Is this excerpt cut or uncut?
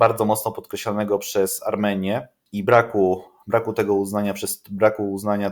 uncut